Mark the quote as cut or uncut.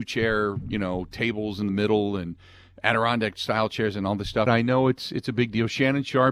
cut